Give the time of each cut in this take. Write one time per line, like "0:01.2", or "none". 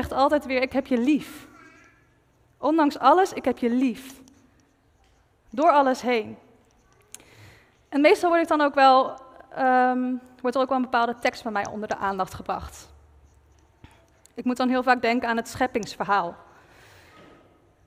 none